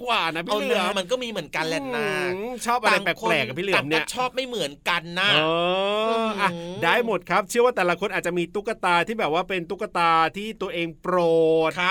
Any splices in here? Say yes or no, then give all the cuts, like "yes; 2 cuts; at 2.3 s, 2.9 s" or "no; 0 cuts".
yes; 1 cut; at 0.9 s